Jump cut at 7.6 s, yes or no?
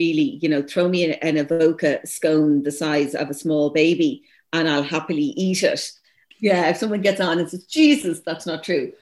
no